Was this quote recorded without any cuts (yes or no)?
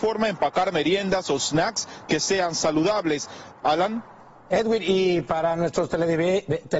no